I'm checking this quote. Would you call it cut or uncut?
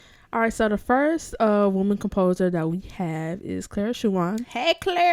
uncut